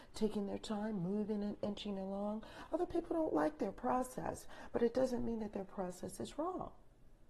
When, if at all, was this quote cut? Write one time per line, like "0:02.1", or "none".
none